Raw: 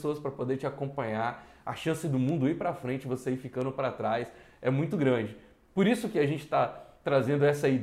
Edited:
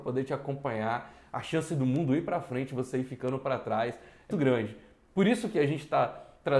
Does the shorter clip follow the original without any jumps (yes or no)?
no